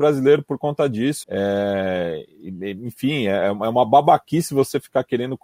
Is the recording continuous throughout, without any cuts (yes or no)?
no